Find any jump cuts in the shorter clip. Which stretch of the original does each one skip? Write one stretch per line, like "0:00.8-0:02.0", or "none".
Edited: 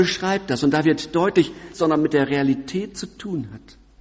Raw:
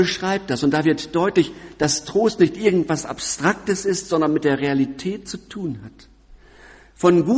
0:01.7-0:04.0